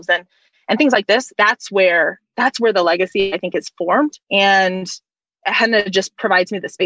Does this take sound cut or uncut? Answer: cut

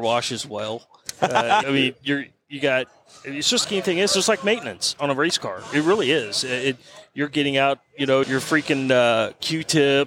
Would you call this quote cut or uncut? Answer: cut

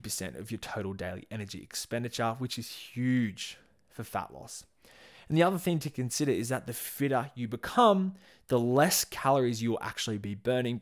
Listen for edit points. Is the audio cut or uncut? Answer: uncut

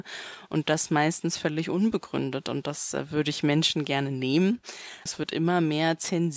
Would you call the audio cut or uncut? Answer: cut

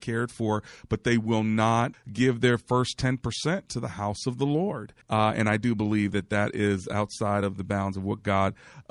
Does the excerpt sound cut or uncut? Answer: cut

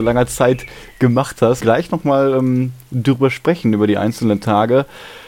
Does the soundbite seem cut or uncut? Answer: cut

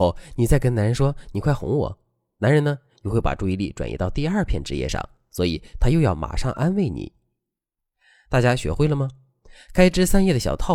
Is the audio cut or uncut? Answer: uncut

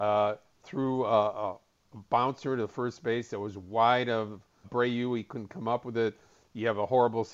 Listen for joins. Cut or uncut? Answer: cut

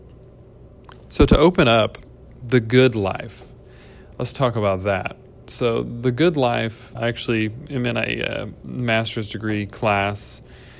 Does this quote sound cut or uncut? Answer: cut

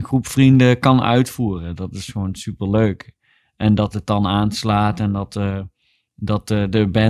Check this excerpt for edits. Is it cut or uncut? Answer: uncut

